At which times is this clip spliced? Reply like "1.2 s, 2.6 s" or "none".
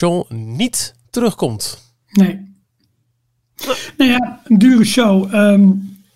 2.0 s